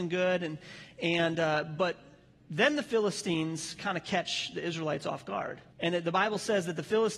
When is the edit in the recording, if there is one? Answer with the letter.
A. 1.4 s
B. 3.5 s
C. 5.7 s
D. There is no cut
C